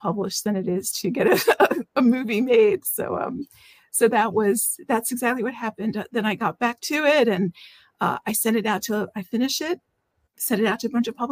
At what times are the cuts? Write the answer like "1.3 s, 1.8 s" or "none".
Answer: none